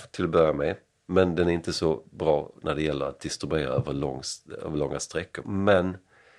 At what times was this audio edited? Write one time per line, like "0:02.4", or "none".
0:05.4